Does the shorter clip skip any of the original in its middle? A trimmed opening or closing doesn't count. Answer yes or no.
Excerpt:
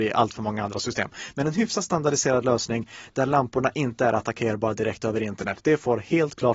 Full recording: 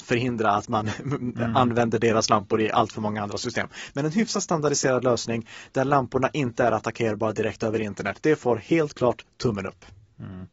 no